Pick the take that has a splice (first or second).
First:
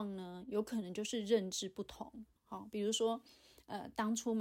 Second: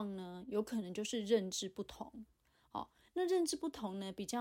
first